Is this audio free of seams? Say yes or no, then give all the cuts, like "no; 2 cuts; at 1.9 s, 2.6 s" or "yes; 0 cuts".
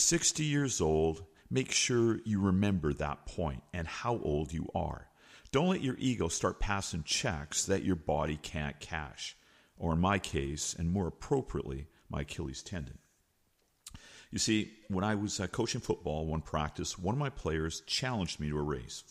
yes; 0 cuts